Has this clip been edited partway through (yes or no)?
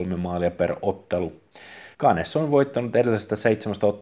yes